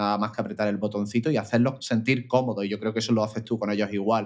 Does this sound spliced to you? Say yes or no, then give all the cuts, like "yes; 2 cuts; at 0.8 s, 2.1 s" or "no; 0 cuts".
yes; 1 cut; at 1.8 s